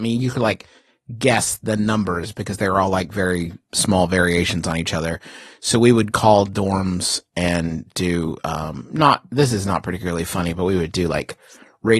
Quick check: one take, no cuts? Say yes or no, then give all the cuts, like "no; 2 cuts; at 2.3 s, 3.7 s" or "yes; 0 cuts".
yes; 0 cuts